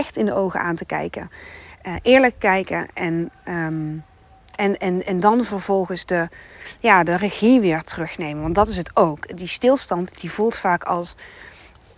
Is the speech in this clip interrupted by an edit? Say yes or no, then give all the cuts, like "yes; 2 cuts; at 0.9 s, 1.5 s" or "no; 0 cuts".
no; 0 cuts